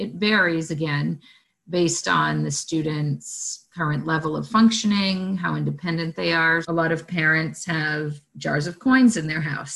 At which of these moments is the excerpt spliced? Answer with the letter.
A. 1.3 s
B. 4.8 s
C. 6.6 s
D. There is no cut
C